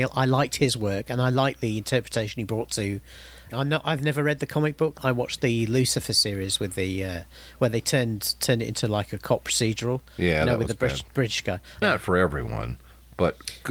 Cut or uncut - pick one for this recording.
cut